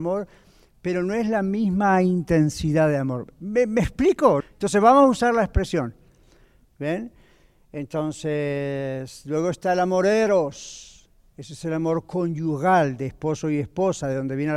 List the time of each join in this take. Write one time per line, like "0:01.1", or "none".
0:04.4
0:06.6